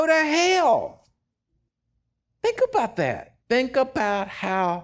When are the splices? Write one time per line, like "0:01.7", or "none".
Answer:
0:03.4